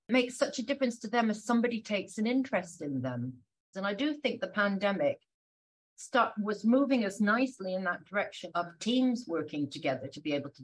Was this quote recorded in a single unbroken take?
no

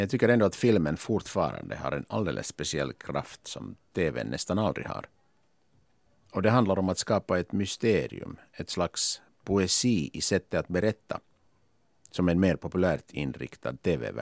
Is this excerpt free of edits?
yes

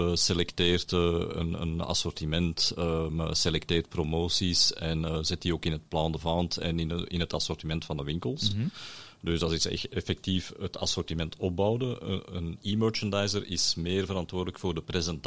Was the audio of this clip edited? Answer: no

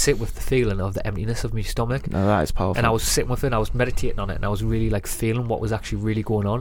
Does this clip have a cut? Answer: no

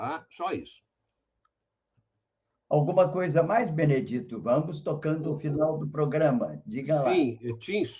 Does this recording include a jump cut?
yes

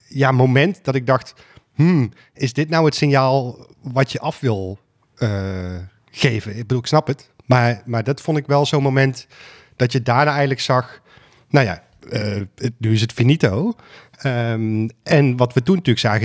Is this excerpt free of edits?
yes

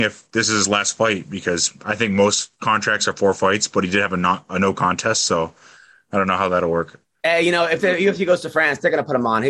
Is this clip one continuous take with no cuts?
yes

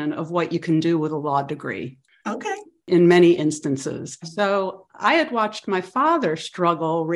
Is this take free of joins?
no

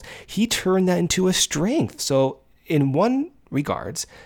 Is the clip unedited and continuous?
no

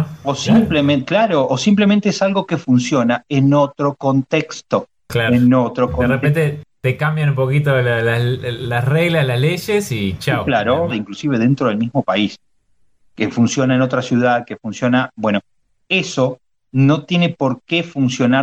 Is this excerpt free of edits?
no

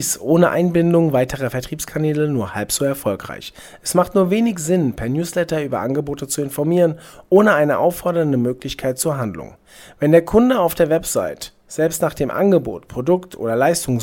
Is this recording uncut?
yes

